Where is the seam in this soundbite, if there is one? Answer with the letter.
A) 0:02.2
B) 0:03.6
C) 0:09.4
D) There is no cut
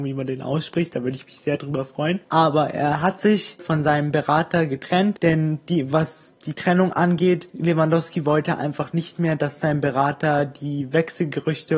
B